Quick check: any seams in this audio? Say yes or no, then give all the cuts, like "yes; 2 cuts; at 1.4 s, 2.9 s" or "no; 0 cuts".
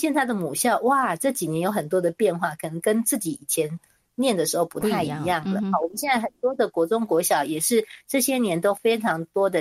no; 0 cuts